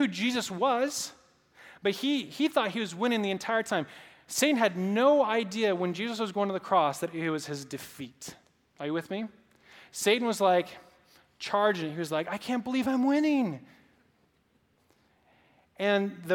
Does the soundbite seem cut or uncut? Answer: uncut